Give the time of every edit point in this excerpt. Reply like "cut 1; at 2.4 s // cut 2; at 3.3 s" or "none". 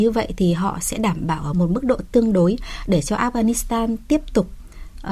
cut 1; at 1.5 s